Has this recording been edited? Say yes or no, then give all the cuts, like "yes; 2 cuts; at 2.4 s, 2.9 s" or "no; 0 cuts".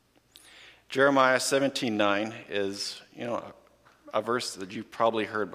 no; 0 cuts